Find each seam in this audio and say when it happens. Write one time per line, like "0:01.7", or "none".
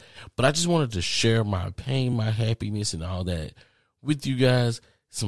none